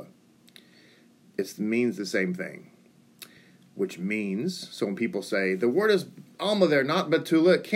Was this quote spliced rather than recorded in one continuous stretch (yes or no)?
no